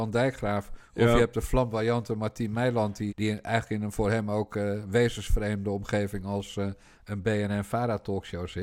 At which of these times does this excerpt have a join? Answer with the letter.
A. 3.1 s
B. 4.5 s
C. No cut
A